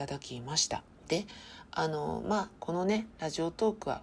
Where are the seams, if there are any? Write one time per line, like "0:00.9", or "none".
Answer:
0:02.6